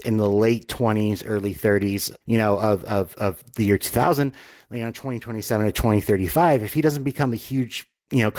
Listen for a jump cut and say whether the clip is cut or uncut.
cut